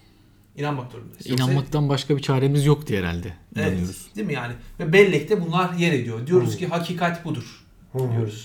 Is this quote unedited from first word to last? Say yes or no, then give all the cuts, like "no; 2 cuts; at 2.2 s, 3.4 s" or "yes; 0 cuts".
yes; 0 cuts